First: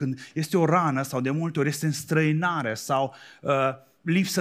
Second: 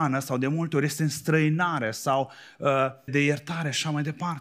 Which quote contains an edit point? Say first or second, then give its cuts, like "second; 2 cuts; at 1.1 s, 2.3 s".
second; 1 cut; at 3.1 s